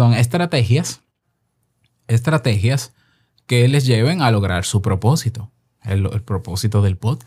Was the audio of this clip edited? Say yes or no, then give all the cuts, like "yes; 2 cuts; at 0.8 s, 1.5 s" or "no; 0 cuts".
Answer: no; 0 cuts